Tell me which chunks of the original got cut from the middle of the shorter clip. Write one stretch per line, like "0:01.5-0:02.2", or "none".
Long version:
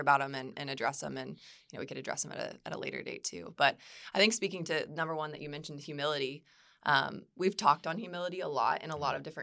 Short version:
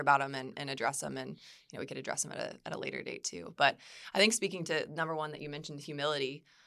none